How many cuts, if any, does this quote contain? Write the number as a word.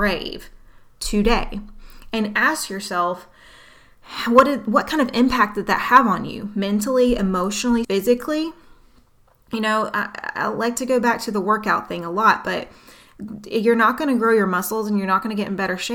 one